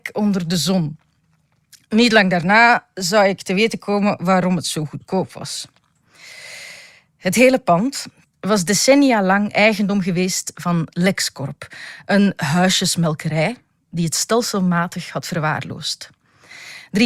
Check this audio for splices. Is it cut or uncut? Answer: cut